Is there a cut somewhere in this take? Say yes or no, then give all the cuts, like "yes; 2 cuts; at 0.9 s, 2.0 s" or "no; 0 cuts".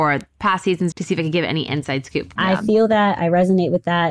yes; 2 cuts; at 0.9 s, 2.4 s